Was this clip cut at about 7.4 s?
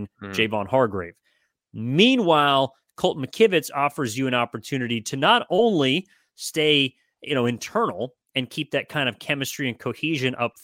no; 0 cuts

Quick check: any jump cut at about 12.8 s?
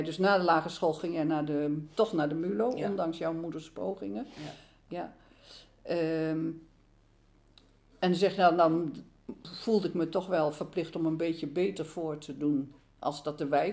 no; 0 cuts

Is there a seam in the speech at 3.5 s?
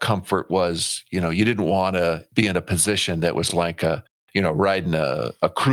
no; 0 cuts

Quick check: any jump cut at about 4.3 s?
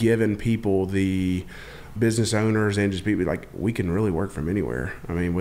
no; 1 cut; at 2.0 s

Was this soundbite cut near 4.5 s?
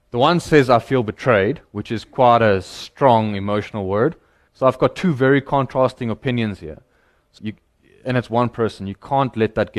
yes; 2 cuts; at 4.5 s, 7.4 s

